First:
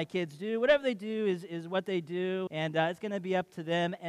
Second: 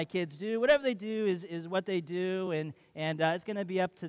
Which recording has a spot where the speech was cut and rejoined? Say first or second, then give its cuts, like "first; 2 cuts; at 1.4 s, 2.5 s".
first; 1 cut; at 2.5 s